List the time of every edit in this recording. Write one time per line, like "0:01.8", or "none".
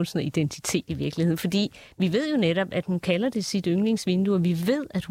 0:02.8